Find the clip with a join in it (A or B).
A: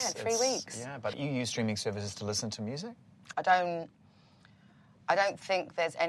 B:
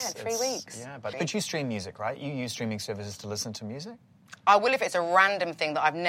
A